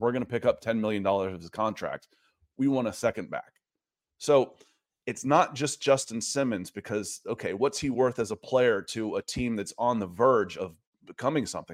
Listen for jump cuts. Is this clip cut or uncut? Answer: uncut